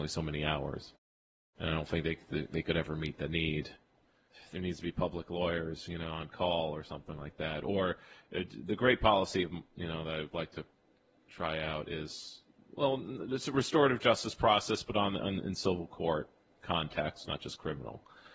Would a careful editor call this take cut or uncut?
uncut